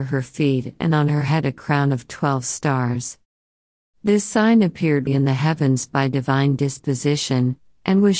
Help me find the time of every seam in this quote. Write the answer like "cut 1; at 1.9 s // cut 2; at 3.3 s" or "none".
cut 1; at 5.1 s